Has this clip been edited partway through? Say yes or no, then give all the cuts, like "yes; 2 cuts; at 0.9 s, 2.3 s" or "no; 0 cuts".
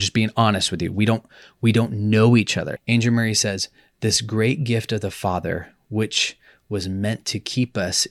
yes; 1 cut; at 2.8 s